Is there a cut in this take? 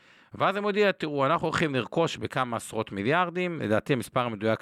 no; 0 cuts

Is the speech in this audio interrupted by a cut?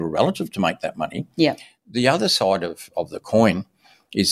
no; 0 cuts

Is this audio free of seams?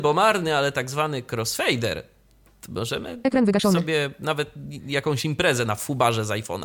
yes; 0 cuts

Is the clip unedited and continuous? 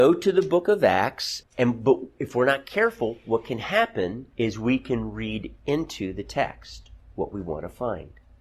no; 2 cuts; at 1.4 s, 4.3 s

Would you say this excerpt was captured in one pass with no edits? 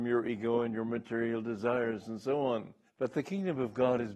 no; 1 cut; at 2.9 s

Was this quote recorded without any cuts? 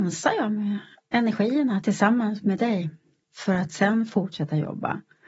no; 1 cut; at 3.2 s

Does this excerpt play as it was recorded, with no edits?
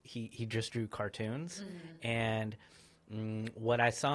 yes; 0 cuts

